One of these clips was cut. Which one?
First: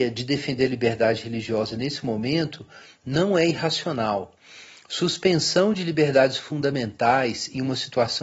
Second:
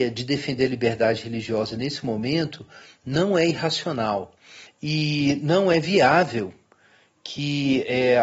second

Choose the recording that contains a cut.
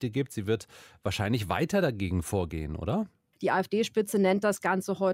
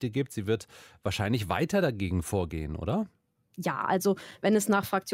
first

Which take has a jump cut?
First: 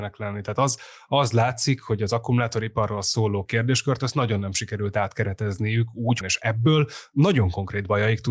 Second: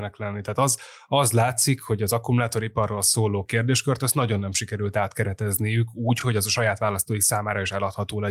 first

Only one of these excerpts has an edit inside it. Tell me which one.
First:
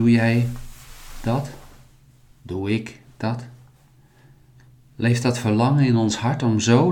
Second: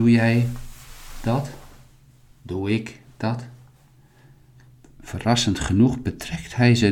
second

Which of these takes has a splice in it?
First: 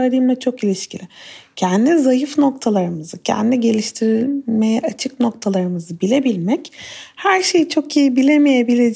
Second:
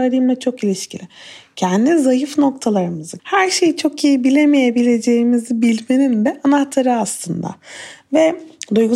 second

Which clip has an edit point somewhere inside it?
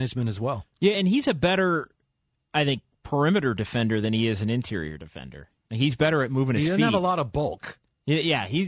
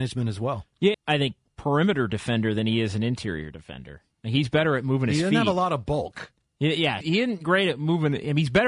second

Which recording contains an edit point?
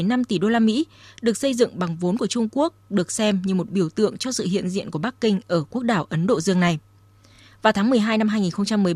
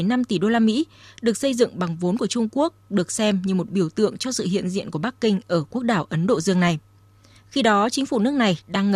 second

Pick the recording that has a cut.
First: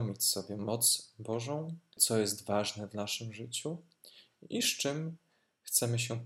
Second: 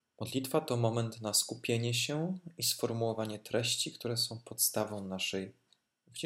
first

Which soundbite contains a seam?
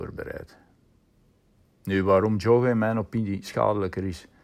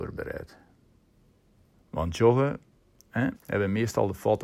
second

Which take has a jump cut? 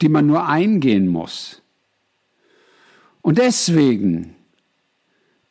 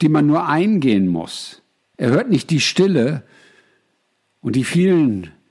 second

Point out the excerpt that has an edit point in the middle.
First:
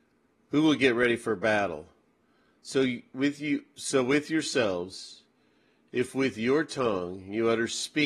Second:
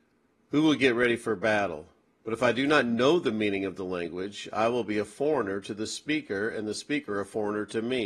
second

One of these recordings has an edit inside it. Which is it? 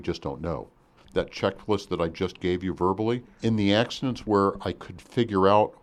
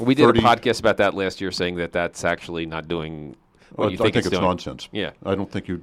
first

